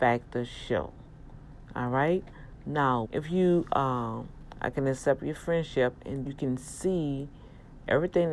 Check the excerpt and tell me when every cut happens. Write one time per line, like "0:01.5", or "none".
0:03.0
0:04.5
0:06.3